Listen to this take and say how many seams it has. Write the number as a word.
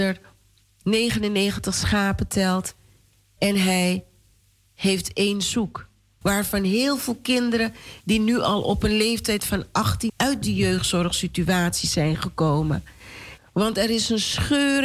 three